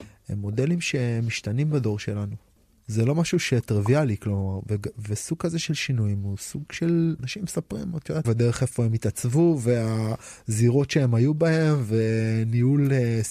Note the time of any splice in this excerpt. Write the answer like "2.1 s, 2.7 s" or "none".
7.2 s, 8.2 s